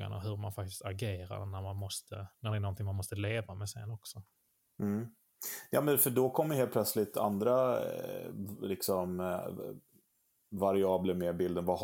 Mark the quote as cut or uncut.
uncut